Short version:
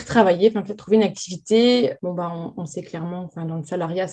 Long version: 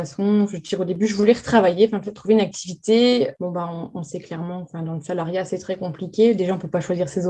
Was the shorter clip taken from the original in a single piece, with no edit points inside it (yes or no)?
yes